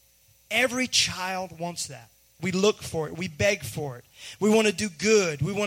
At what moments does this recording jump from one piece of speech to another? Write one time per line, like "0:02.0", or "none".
0:02.4

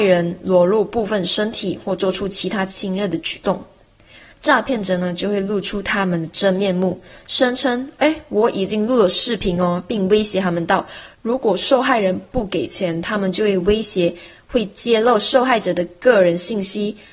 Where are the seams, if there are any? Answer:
0:04.3

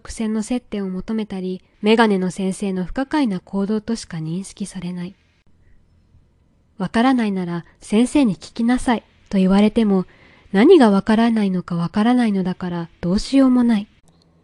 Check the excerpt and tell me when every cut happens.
0:01.7

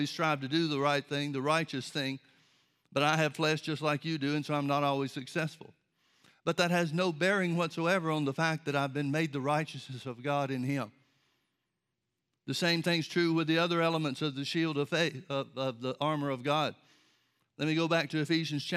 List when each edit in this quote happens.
none

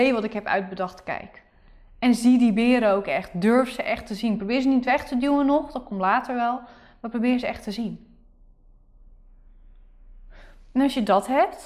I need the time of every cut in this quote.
none

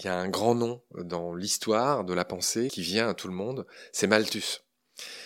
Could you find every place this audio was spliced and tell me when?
none

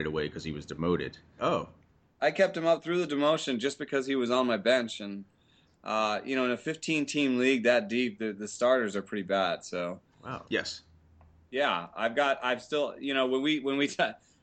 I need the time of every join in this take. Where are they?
0:01.4
0:10.4

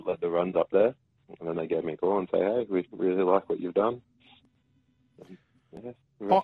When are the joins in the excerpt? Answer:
none

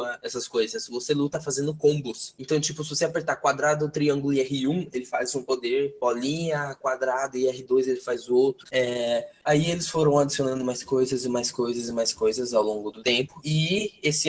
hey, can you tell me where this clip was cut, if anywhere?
0:08.6

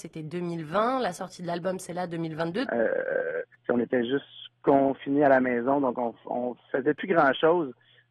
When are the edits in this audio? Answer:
0:02.7

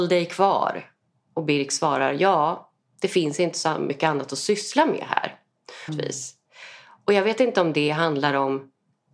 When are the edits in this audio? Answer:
0:05.9

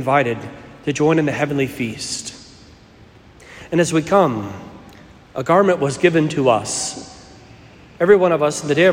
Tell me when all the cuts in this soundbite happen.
none

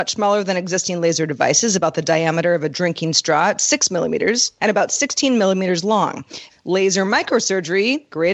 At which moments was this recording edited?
0:04.6
0:06.5

